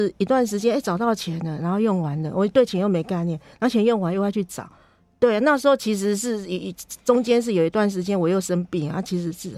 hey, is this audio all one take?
yes; 0 cuts

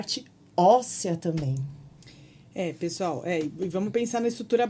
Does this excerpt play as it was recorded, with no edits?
yes; 0 cuts

